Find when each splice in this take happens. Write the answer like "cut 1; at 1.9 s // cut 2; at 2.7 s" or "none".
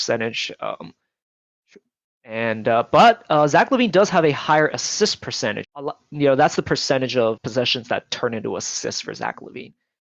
cut 1; at 5.6 s // cut 2; at 7.4 s